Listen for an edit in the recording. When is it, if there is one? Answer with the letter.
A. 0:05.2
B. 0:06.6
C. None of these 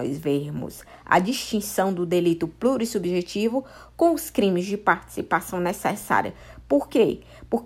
C